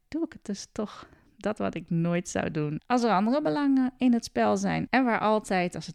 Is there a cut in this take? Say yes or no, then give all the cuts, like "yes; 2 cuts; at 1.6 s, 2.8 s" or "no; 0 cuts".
yes; 2 cuts; at 2.8 s, 4.9 s